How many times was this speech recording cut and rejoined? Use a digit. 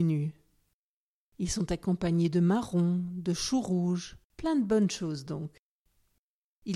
1